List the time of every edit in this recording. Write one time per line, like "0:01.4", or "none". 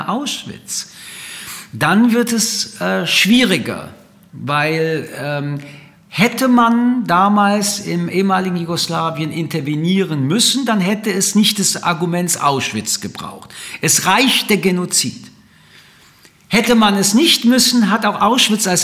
none